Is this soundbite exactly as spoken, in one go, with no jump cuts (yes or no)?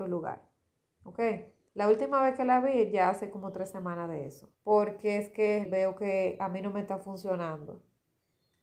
no